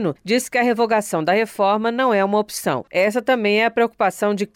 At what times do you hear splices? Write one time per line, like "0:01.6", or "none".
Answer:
0:02.8